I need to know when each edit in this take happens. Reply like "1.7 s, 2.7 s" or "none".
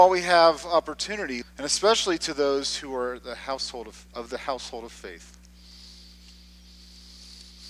1.4 s